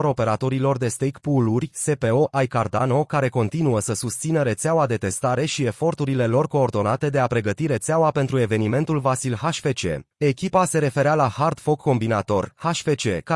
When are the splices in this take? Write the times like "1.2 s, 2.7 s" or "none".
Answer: 10.1 s